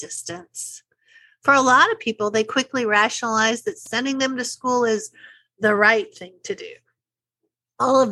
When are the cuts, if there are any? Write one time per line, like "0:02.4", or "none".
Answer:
none